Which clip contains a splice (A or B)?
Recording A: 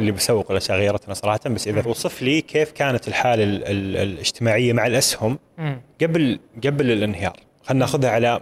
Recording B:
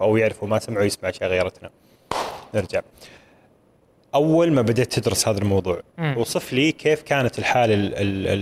A